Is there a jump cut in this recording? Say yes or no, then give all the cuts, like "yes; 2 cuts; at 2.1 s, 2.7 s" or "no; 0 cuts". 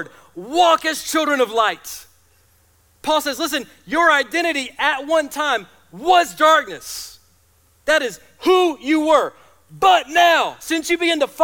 no; 0 cuts